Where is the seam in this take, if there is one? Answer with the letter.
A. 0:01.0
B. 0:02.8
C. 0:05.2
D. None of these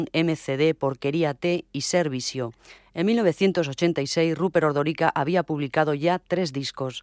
B